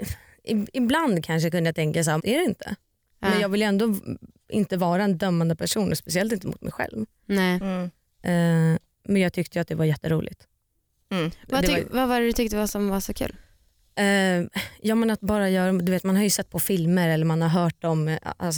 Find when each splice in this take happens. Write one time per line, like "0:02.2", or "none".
0:02.2